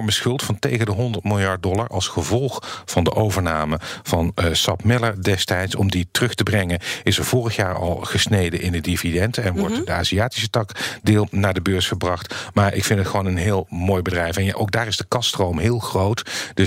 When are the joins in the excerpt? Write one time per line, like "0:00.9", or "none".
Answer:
none